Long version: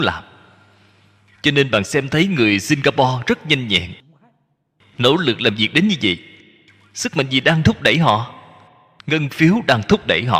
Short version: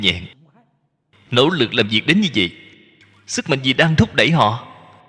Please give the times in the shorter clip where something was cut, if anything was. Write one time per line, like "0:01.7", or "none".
none

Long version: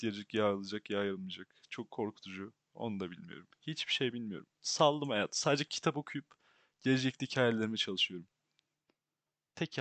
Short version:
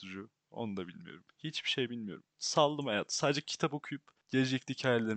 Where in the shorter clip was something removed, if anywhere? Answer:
0:04.2

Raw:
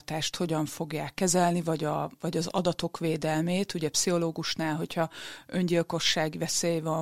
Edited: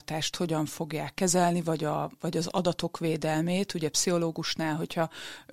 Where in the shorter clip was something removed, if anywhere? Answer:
none

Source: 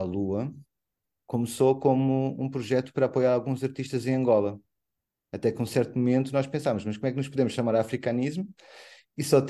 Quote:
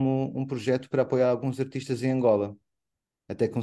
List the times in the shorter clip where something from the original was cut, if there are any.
none

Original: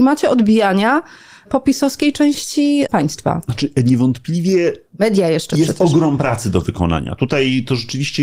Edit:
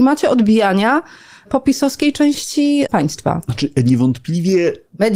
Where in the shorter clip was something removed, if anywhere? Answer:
none

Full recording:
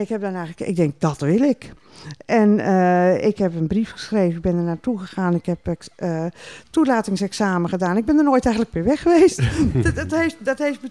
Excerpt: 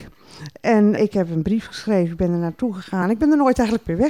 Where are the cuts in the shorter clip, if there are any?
0:01.0
0:03.0

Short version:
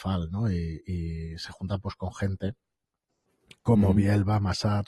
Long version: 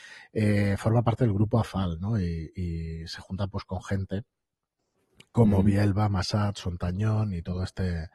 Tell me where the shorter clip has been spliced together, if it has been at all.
none

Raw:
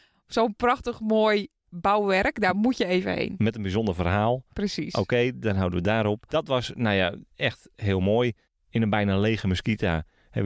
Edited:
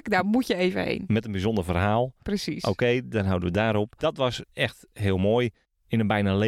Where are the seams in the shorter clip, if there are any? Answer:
0:04.4

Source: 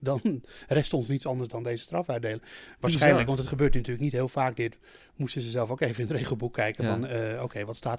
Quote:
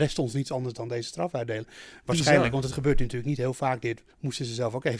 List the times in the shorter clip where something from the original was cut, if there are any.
0:04.1

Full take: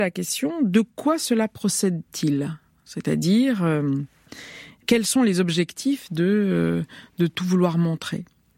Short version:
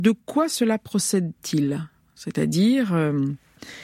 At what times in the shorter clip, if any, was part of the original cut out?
none

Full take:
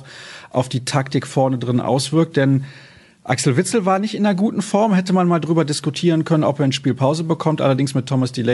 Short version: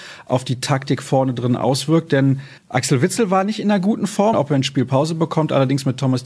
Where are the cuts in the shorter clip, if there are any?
0:02.6
0:04.3

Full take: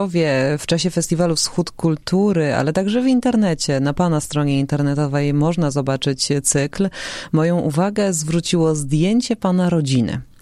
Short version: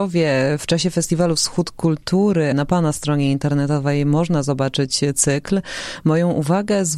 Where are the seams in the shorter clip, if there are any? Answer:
0:02.5

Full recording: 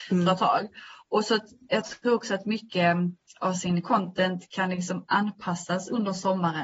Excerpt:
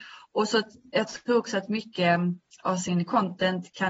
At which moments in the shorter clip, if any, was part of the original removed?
none

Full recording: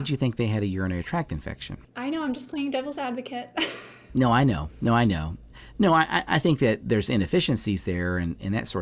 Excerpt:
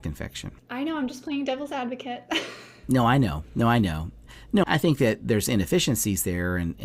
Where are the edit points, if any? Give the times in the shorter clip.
0:04.6

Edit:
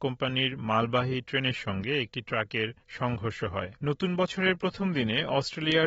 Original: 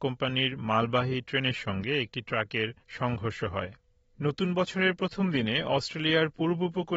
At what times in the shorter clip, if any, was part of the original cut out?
0:03.8

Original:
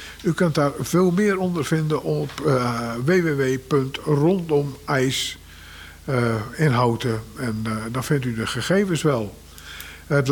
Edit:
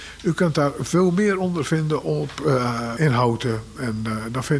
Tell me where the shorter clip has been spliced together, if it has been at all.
0:03.0

